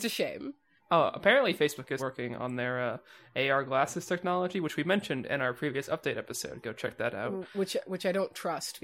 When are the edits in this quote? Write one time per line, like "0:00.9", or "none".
0:02.0